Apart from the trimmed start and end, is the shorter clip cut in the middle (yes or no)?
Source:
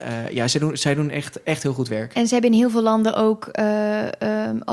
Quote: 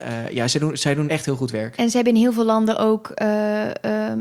yes